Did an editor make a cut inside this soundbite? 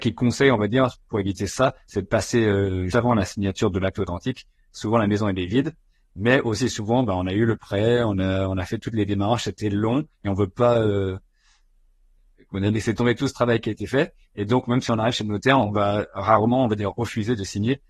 yes; 1 cut; at 2.9 s

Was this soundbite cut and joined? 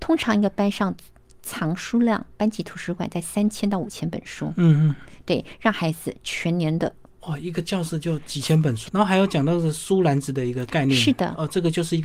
yes; 2 cuts; at 7.2 s, 8.9 s

